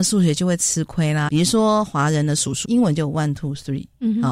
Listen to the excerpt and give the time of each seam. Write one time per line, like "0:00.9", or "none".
0:01.3
0:02.6